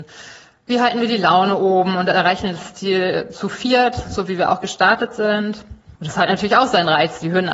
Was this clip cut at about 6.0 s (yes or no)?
yes